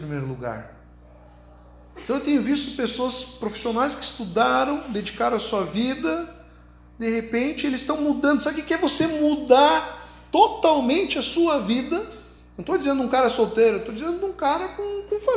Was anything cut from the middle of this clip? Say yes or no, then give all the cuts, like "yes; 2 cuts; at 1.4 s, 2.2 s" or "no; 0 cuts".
no; 0 cuts